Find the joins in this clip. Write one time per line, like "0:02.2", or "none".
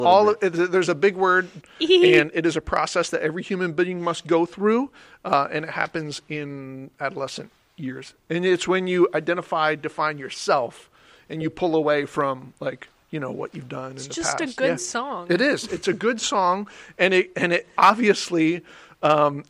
0:01.6